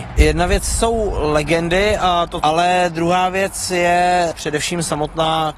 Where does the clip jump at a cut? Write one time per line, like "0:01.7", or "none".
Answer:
0:02.4
0:04.3